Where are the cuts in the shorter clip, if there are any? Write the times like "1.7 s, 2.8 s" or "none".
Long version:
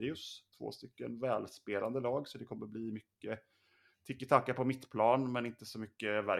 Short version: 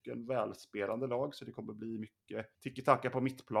2.5 s